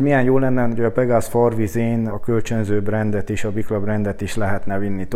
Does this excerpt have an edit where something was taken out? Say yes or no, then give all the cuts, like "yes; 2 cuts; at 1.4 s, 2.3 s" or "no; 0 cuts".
yes; 1 cut; at 2.1 s